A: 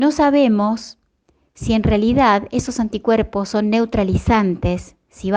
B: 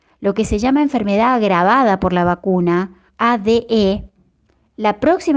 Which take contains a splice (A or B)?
B